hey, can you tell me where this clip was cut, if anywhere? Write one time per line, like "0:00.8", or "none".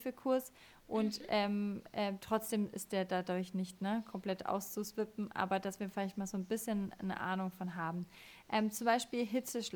none

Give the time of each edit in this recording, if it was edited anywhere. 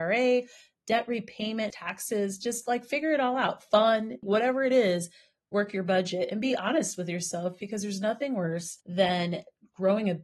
0:01.7
0:04.2

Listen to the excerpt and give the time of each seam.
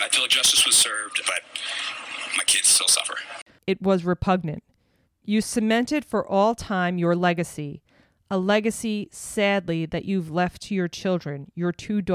0:01.2
0:03.6

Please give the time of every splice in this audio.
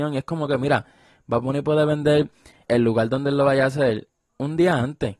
0:02.7

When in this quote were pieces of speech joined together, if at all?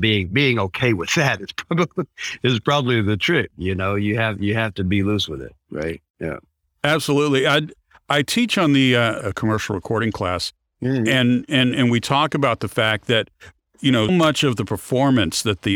0:09.2
0:14.1

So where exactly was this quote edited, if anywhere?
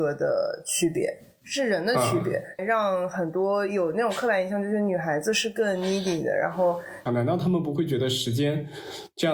0:02.6
0:07.1

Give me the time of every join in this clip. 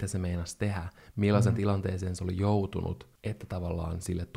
0:01.1

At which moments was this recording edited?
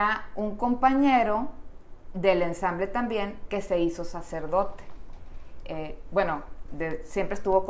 0:05.6
0:06.7

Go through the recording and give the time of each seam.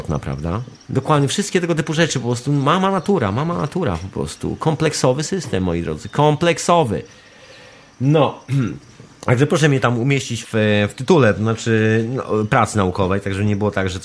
0:10.4

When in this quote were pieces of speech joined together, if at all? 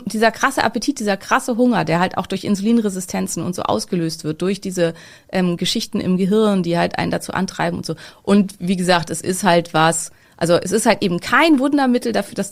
0:08.1

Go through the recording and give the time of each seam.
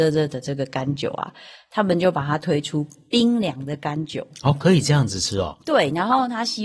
none

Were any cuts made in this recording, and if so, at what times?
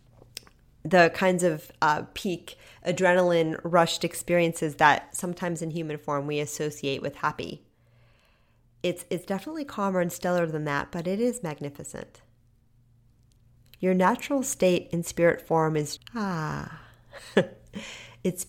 0:13.7
0:16.0

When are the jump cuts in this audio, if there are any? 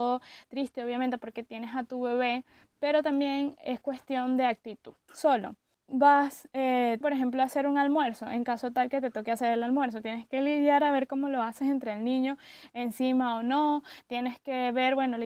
0:05.1
0:07.0

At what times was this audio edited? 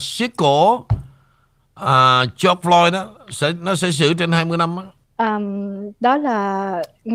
0:05.0

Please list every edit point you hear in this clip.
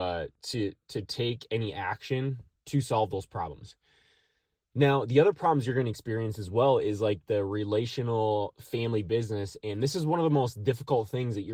none

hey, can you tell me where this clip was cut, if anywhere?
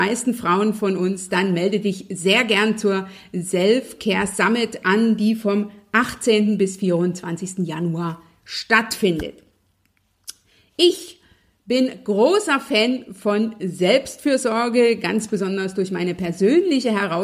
none

